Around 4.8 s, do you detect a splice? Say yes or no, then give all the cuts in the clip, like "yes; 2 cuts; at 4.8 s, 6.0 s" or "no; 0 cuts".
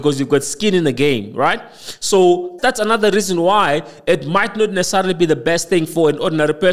no; 1 cut; at 2.6 s